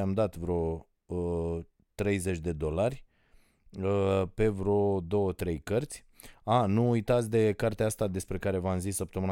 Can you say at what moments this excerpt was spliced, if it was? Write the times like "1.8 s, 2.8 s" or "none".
none